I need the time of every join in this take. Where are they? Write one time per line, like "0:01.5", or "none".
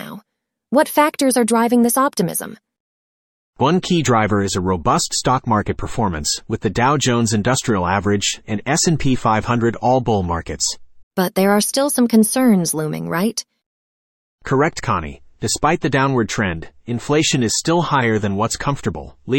0:08.4
0:11.0